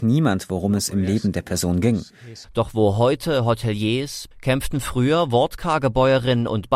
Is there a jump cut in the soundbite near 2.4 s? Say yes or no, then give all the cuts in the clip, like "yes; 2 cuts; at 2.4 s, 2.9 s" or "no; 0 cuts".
yes; 2 cuts; at 2.4 s, 4.3 s